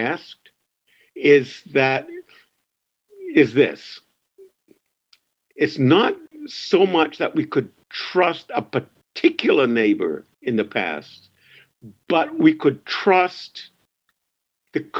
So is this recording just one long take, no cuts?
yes; 0 cuts

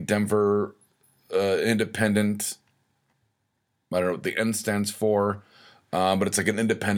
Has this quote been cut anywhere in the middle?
no; 0 cuts

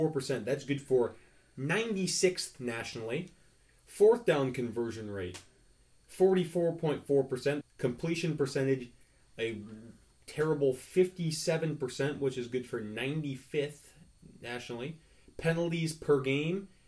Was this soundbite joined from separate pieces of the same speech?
yes; 1 cut; at 7.6 s

